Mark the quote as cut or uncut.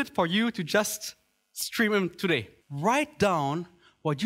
cut